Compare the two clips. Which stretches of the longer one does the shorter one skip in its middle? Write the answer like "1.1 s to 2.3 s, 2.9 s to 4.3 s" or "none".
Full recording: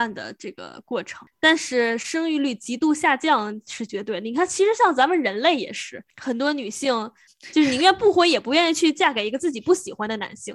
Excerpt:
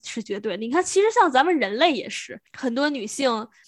none